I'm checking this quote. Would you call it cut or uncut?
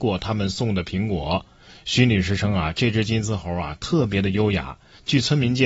uncut